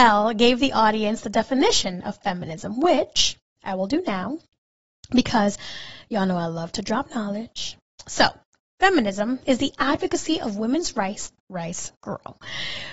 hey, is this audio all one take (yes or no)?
no